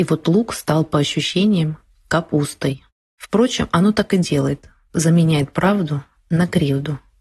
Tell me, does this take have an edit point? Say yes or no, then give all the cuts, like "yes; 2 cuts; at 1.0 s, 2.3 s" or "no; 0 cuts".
yes; 1 cut; at 3.0 s